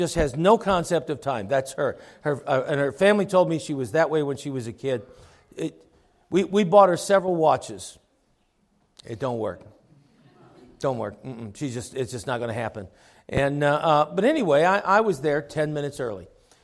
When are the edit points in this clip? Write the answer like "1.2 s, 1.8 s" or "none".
none